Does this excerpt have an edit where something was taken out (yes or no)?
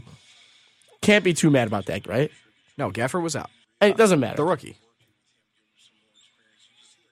yes